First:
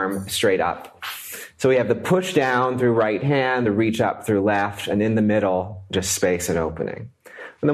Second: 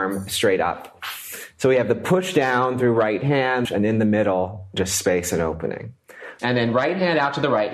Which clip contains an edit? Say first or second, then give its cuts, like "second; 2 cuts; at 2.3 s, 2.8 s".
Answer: second; 2 cuts; at 3.6 s, 6.4 s